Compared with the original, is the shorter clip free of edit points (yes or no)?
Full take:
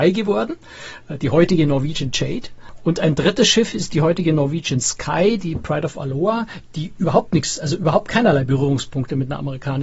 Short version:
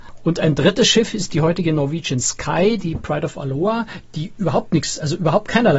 yes